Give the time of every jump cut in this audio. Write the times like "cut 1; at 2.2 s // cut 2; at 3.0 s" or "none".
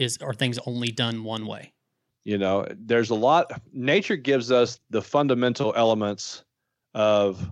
cut 1; at 2.1 s // cut 2; at 4.8 s